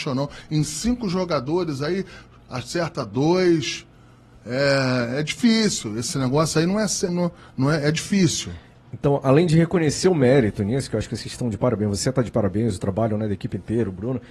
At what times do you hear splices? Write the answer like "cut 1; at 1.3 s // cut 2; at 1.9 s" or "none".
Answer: cut 1; at 7.1 s